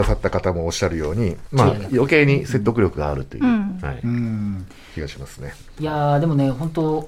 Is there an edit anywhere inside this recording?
no; 0 cuts

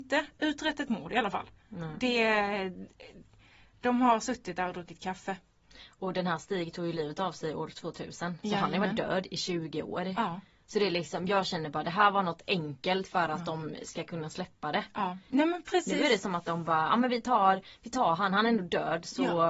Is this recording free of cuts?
no; 1 cut; at 15.3 s

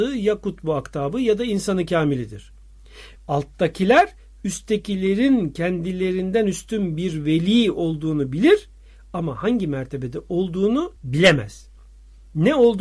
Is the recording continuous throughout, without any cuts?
no; 2 cuts; at 3.2 s, 11.0 s

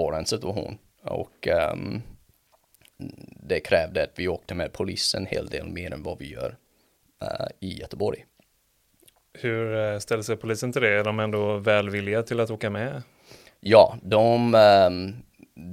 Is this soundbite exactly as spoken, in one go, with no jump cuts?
yes; 0 cuts

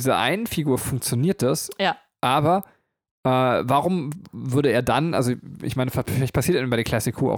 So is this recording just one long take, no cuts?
yes; 0 cuts

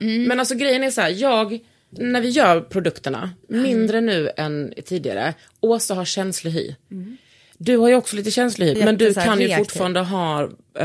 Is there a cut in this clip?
yes; 2 cuts; at 3.4 s, 8.8 s

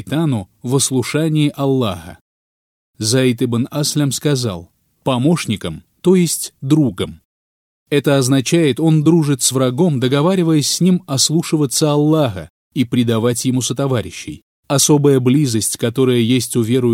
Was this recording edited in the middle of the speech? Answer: yes; 1 cut; at 14.5 s

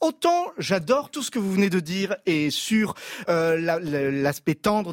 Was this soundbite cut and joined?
no; 0 cuts

